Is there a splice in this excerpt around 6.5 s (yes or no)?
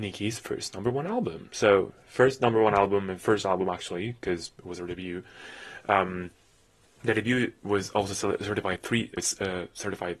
no